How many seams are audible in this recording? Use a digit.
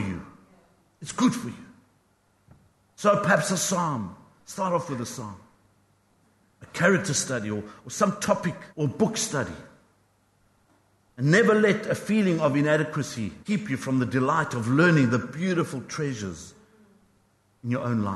2